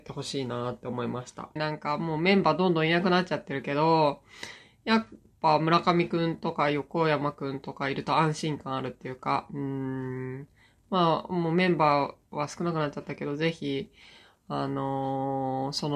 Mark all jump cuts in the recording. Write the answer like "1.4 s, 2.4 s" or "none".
1.6 s